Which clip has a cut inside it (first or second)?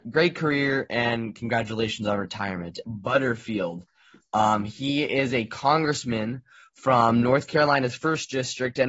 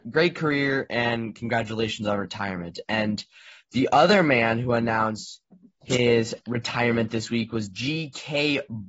first